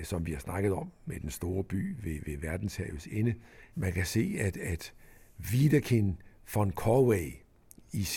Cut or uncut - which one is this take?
cut